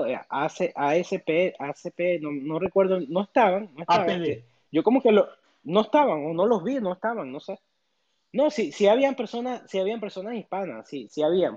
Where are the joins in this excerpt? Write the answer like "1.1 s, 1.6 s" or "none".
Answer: none